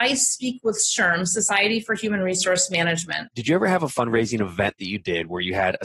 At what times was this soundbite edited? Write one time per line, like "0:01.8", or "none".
0:03.3